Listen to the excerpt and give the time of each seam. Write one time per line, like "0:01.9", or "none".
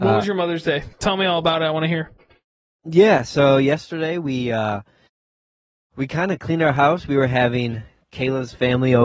none

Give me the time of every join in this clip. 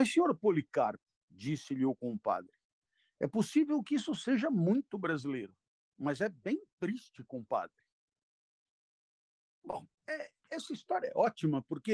none

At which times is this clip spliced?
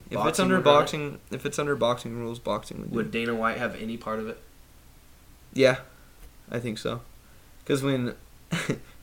none

